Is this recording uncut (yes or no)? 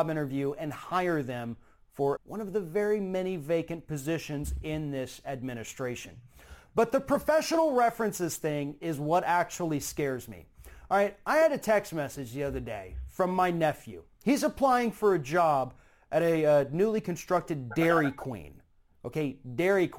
no